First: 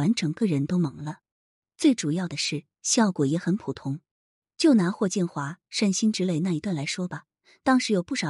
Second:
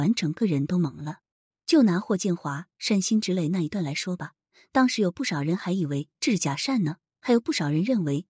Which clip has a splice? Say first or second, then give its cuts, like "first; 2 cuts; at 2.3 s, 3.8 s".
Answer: second; 1 cut; at 1.5 s